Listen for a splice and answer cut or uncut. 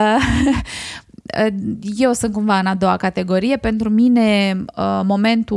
uncut